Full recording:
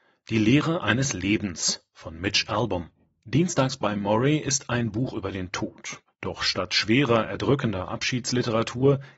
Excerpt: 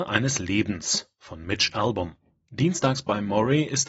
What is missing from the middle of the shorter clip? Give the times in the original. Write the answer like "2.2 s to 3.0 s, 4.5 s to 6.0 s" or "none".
none

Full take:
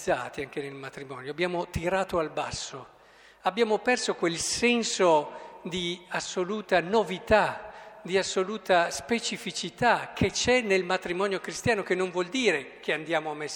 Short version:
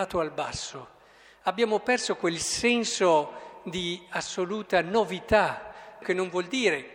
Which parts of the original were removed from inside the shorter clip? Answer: 8.0 s to 11.8 s

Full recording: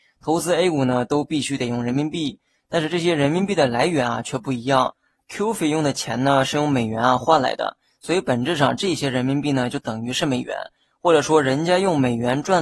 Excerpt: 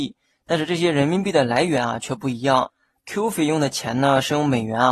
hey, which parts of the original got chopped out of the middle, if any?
none

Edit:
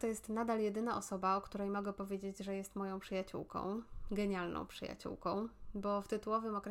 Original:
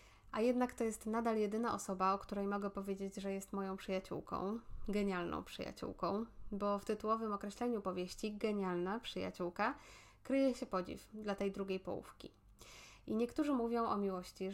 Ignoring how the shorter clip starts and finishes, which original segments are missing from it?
none

